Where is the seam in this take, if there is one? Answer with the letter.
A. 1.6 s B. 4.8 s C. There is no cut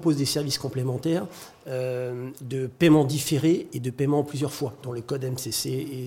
B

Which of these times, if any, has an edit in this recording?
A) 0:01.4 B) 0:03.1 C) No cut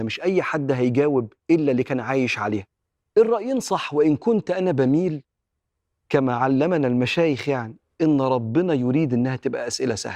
A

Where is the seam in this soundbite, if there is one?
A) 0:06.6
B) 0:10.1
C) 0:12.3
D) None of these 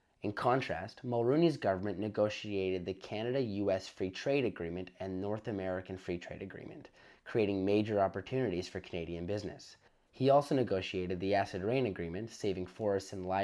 D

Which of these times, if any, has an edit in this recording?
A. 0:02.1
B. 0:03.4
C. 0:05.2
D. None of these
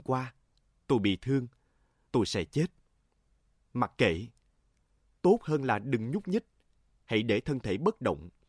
A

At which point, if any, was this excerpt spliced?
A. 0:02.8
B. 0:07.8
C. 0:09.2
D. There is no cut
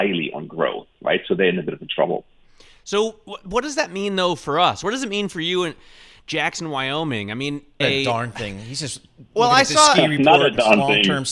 B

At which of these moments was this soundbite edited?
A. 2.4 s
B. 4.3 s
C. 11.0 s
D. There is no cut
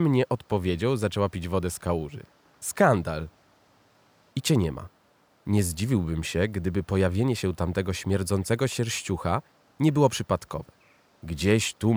B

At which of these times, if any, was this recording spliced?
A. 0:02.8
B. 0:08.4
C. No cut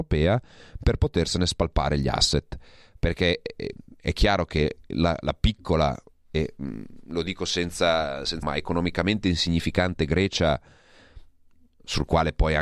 B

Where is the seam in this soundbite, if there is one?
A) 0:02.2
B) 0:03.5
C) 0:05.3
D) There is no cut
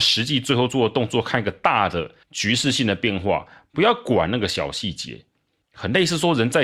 A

